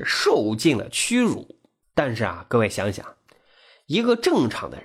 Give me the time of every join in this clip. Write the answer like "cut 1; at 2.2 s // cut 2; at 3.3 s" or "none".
none